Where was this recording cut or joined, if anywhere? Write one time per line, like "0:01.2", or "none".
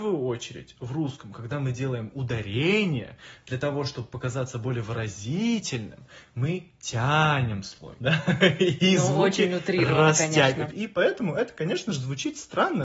0:10.7